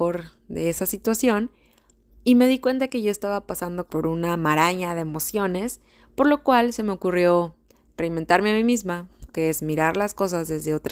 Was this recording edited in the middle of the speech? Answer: yes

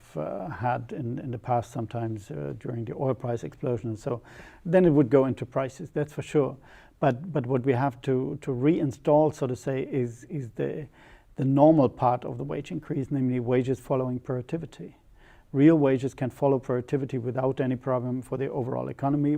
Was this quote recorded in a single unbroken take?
yes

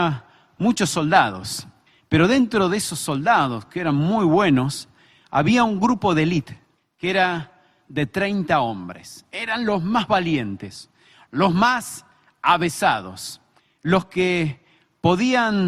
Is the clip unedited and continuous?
yes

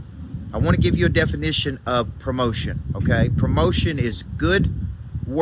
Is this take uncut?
yes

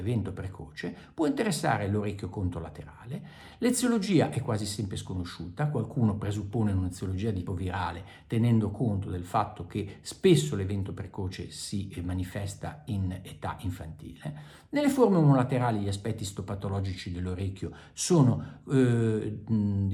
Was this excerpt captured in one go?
no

